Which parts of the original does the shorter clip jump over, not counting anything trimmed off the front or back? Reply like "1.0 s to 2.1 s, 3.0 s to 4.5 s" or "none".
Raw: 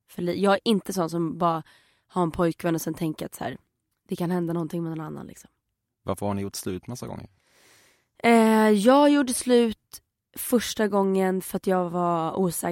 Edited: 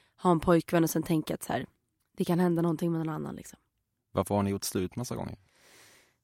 none